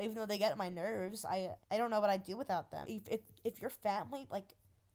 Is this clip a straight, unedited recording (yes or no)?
no